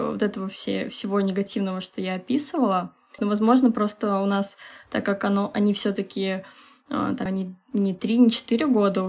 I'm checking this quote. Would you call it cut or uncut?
cut